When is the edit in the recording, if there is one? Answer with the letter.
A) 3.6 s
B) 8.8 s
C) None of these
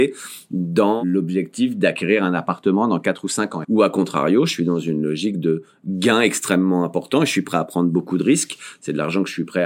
A